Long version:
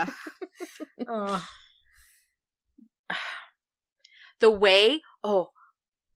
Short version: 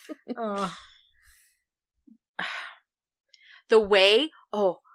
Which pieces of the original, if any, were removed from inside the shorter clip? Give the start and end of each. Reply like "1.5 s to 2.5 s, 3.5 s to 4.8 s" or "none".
none